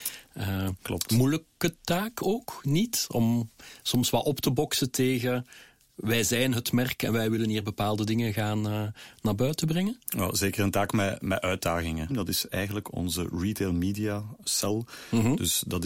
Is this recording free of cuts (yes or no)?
no